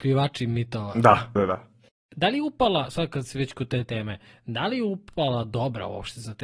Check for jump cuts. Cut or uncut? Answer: cut